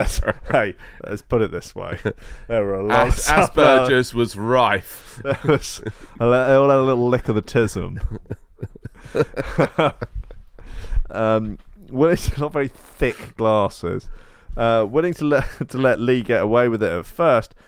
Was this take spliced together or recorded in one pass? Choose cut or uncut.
uncut